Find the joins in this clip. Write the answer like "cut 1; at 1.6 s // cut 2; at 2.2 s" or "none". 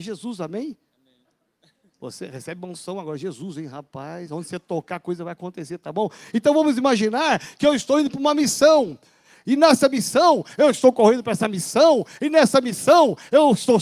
none